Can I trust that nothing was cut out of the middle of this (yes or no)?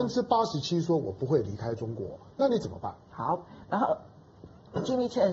no